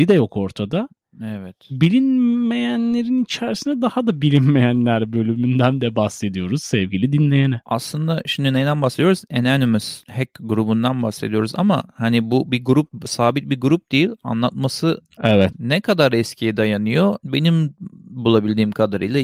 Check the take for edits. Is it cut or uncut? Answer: cut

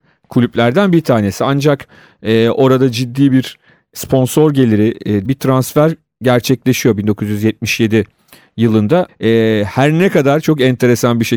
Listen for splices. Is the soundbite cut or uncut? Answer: cut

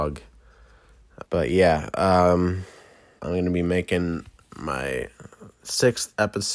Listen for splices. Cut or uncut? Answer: cut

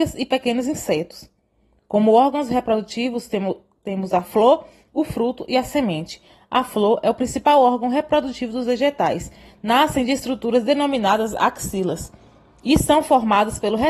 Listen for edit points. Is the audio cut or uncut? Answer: uncut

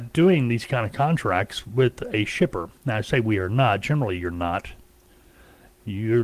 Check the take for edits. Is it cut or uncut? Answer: uncut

